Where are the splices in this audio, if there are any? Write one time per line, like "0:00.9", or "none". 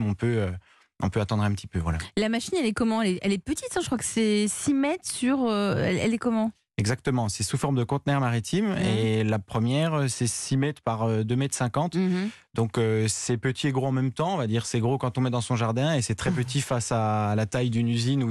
none

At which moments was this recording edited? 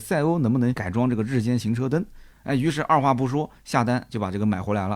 0:02.3

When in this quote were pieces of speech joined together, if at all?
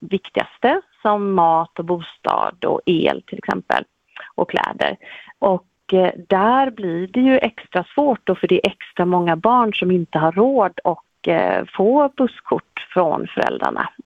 0:05.3

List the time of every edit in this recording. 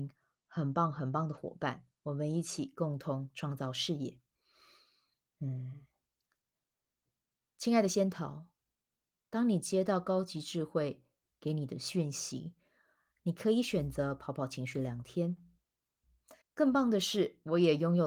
0:16.4

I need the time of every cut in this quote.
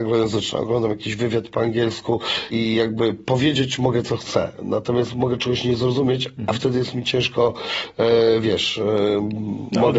0:02.5

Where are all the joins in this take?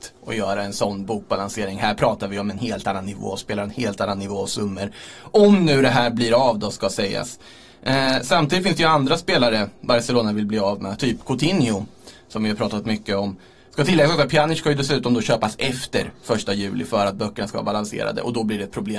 0:13.6

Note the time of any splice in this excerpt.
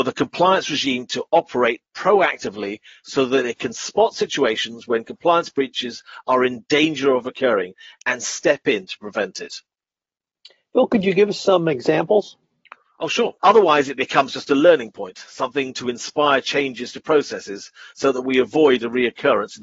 0:13.4

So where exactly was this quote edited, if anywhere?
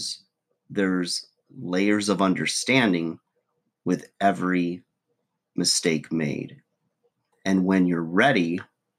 0:07.3

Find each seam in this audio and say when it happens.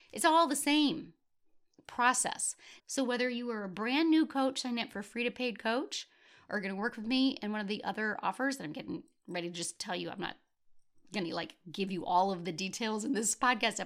0:02.8

